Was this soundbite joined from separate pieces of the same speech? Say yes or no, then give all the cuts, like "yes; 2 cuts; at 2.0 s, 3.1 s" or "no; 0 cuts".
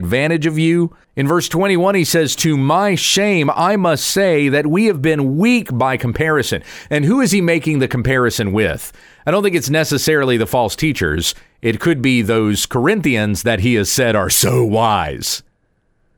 yes; 1 cut; at 1.0 s